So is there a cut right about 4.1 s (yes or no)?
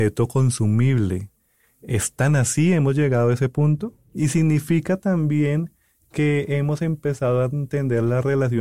yes